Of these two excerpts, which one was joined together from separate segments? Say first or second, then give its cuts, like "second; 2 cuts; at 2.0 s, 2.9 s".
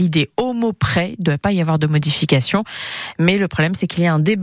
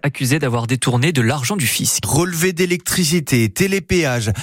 second; 1 cut; at 2.0 s